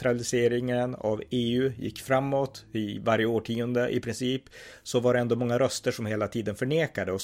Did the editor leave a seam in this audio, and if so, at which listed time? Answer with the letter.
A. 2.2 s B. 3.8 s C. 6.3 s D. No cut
D